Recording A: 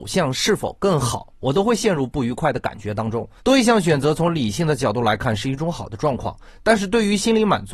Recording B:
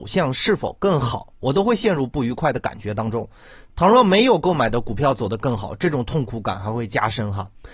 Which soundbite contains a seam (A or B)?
A